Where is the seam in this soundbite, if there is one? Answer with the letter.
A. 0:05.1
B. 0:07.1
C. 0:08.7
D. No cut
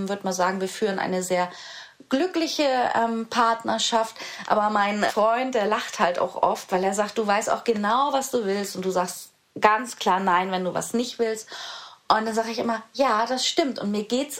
A